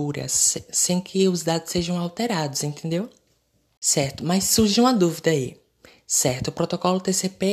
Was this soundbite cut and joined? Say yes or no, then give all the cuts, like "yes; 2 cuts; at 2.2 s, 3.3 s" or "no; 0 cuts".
no; 0 cuts